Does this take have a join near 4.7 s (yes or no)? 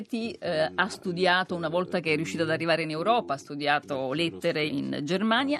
yes